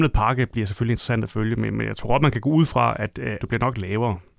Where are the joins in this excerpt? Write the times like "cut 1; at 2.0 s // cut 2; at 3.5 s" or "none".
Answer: cut 1; at 3.4 s